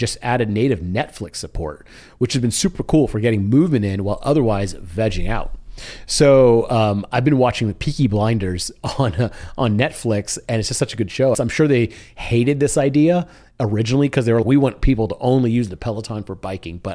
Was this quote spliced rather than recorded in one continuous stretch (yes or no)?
yes